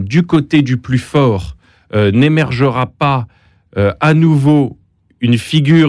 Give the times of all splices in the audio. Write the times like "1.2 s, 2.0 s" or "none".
none